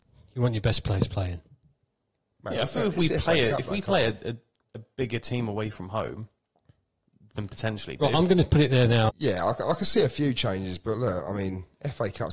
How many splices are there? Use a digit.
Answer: 1